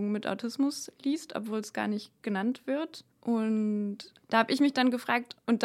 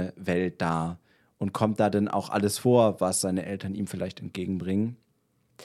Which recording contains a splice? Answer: first; 2 cuts; at 3.1 s, 4.2 s

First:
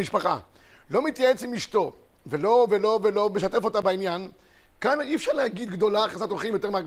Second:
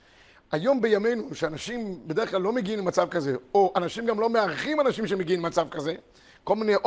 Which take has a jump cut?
first; 1 cut; at 2.7 s

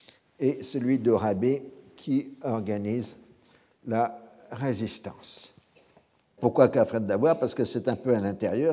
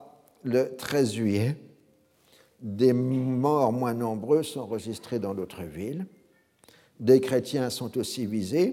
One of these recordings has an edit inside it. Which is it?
first; 1 cut; at 6.4 s

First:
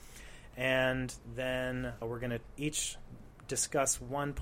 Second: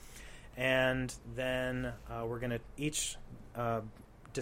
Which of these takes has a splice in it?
first; 2 cuts; at 2.0 s, 3.3 s

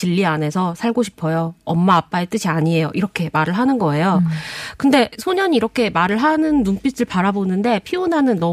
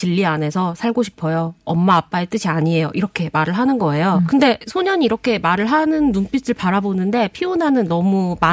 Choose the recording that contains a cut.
second; 1 cut; at 4.3 s

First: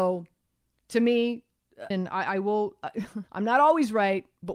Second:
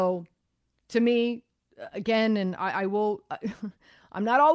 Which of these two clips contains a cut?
first; 2 cuts; at 1.9 s, 3.3 s

